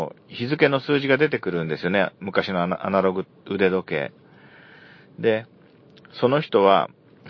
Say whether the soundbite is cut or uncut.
uncut